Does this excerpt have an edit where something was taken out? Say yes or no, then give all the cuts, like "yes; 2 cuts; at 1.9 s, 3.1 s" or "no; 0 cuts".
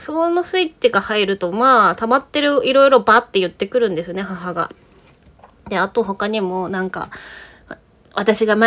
no; 0 cuts